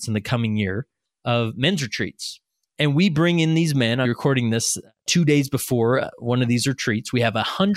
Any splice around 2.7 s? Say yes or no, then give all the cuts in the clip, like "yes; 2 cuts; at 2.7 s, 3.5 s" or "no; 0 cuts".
no; 1 cut; at 4.0 s